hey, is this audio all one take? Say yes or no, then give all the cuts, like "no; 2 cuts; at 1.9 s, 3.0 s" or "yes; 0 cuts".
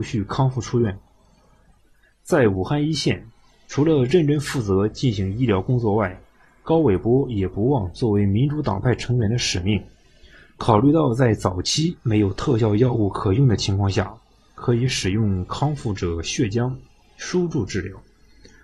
yes; 0 cuts